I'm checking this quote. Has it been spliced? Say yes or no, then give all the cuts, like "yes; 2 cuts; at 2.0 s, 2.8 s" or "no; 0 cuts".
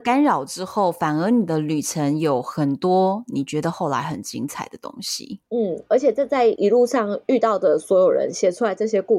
no; 0 cuts